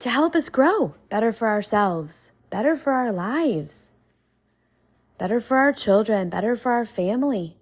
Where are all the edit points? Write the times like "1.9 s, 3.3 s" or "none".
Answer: 1.1 s, 2.4 s